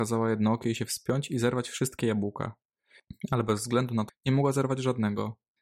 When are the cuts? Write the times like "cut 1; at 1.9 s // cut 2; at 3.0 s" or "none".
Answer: cut 1; at 4.1 s